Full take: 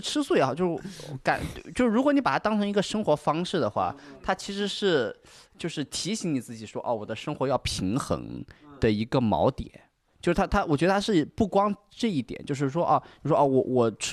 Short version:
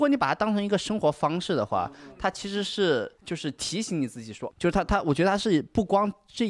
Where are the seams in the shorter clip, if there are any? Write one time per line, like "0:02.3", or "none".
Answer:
0:03.2
0:04.5